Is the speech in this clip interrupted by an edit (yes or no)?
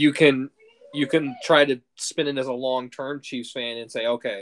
no